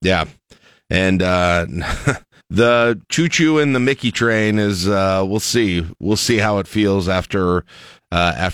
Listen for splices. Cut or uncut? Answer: cut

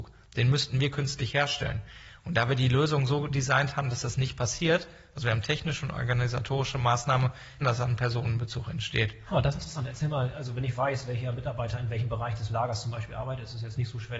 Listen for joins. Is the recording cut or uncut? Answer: cut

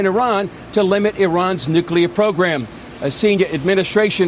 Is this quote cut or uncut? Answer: uncut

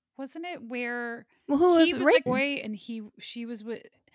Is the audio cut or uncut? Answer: cut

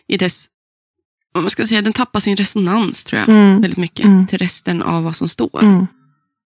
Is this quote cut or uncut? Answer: uncut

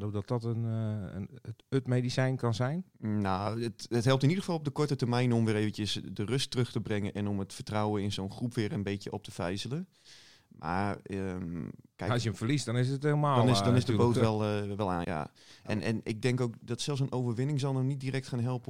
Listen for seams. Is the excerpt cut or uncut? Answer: cut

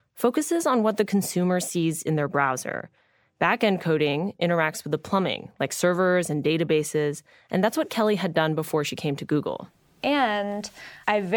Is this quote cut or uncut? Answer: uncut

